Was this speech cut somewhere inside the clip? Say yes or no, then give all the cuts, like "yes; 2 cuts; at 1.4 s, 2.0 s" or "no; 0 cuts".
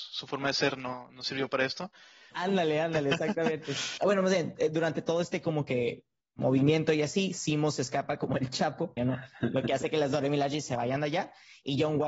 yes; 3 cuts; at 2.3 s, 4.0 s, 9.0 s